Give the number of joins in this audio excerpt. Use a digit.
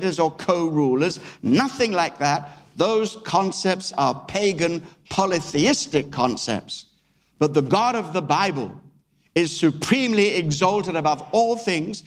0